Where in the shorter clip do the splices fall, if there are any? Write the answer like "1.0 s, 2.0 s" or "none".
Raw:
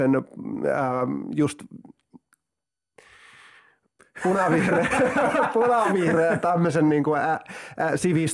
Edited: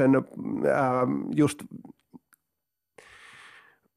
none